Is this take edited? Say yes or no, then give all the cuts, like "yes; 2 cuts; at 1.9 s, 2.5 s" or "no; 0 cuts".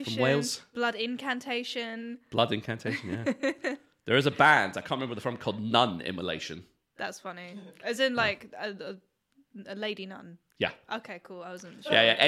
no; 0 cuts